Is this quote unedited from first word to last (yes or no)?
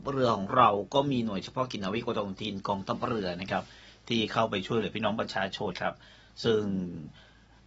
no